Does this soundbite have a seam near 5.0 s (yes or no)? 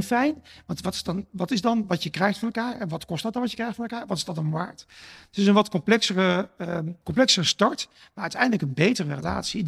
no